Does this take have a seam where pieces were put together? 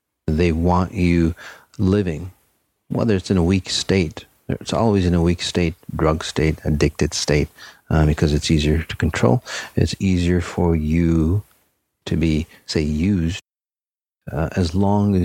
yes; 1 cut; at 1.7 s

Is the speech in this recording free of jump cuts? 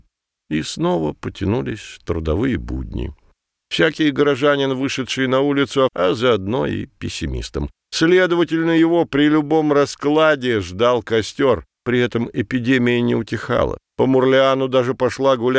no; 1 cut; at 5.9 s

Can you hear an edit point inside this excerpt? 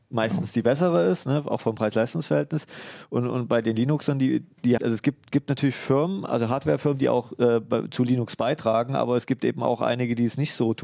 yes; 1 cut; at 4.8 s

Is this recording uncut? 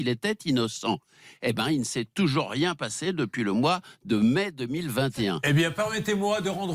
yes; 0 cuts

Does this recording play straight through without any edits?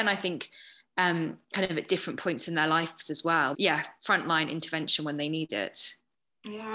no; 1 cut; at 3.5 s

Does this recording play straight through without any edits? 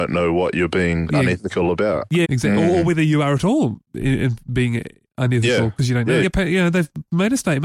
no; 2 cuts; at 2.2 s, 6.2 s

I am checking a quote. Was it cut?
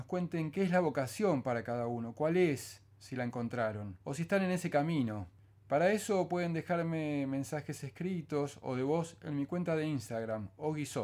yes; 1 cut; at 4.0 s

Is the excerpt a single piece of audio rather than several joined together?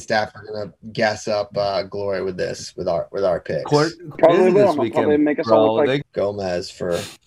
no; 2 cuts; at 4.1 s, 6.0 s

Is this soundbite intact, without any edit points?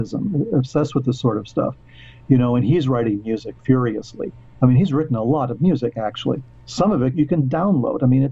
yes; 0 cuts

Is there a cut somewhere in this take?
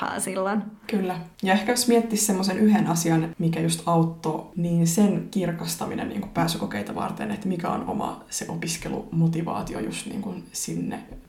no; 0 cuts

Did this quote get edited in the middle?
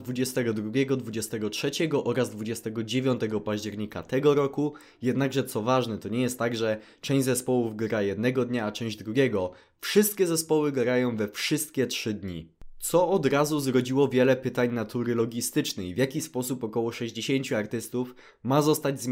no; 0 cuts

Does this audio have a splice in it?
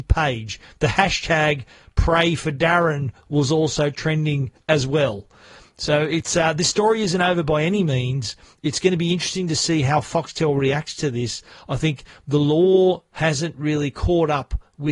no; 0 cuts

